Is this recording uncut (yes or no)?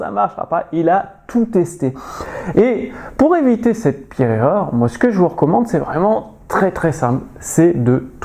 no